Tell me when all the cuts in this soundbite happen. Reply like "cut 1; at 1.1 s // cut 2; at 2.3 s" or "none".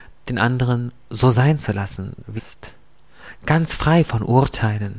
cut 1; at 2.4 s // cut 2; at 3.4 s